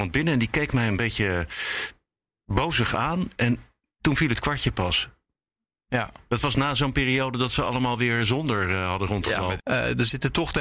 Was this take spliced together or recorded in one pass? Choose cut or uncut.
cut